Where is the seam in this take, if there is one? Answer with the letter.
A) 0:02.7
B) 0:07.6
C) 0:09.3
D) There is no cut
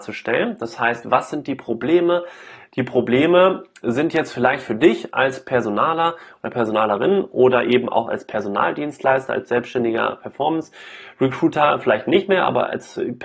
A